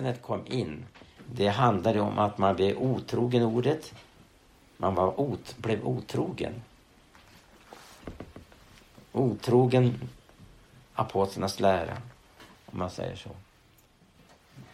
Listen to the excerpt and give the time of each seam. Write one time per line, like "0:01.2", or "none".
0:01.2
0:12.5